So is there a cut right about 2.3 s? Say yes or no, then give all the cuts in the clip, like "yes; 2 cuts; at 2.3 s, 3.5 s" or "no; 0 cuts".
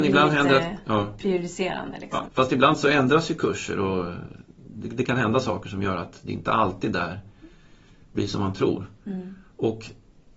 yes; 1 cut; at 2.3 s